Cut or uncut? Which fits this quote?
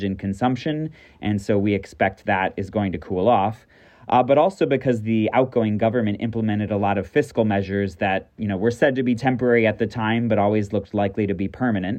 uncut